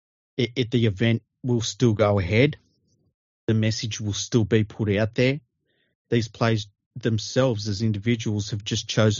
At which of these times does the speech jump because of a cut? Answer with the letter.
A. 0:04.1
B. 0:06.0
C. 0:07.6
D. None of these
D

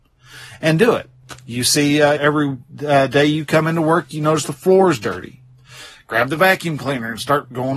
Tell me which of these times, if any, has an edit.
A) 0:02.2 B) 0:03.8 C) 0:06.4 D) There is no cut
A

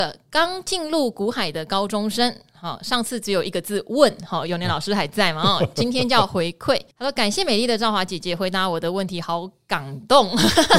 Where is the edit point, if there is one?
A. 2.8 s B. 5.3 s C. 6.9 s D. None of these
C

